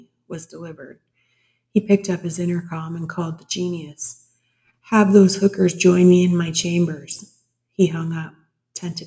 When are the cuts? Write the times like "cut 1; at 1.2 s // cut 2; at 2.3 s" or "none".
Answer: none